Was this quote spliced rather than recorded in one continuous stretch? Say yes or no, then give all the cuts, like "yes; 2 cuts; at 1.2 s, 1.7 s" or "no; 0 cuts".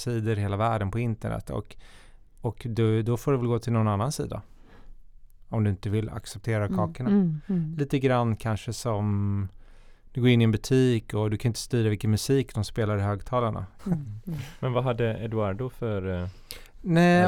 yes; 1 cut; at 13.8 s